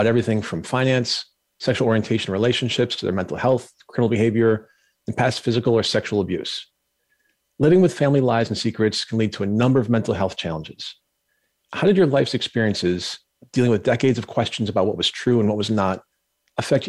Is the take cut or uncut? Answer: uncut